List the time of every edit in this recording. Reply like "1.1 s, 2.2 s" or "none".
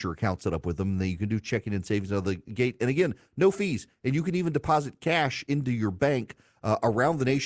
none